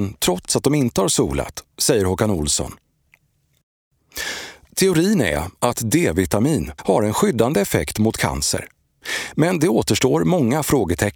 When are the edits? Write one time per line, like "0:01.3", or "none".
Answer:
0:06.8